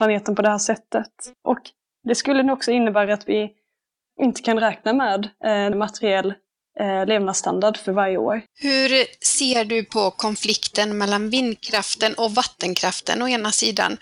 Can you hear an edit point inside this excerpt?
yes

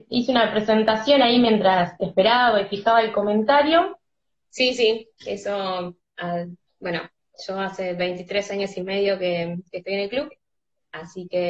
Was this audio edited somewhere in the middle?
yes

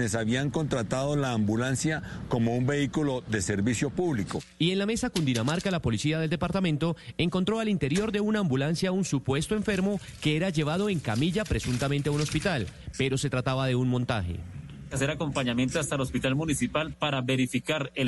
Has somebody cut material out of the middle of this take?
no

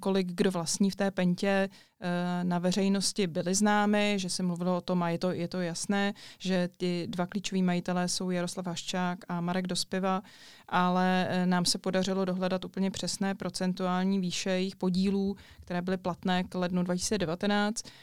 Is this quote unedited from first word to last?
yes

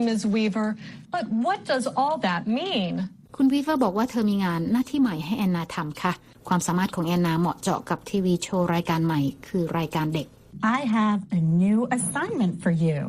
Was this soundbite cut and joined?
no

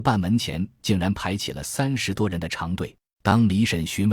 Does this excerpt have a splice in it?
yes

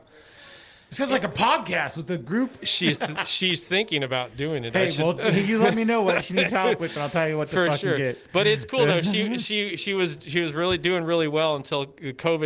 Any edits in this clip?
no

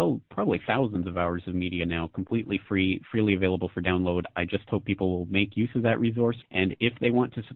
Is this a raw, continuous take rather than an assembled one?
no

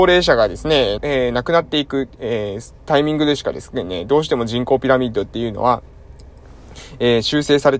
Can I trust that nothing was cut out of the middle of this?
no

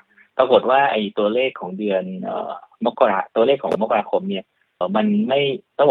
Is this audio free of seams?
no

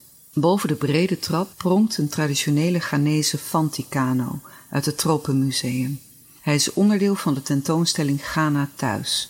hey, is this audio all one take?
yes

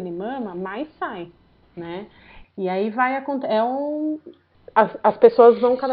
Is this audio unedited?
no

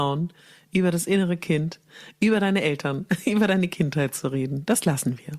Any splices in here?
no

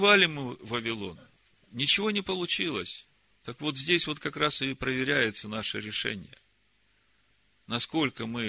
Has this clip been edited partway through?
yes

